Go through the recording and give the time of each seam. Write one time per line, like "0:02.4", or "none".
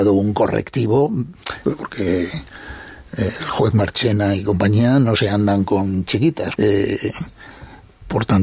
0:01.6
0:06.6